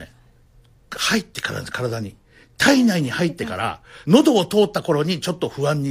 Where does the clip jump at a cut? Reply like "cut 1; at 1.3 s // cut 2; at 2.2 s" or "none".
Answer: cut 1; at 4.0 s